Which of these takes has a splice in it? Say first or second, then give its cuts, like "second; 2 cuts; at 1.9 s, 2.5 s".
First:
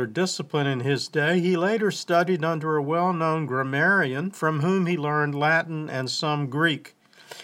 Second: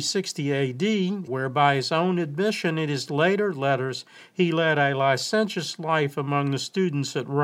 second; 1 cut; at 1.3 s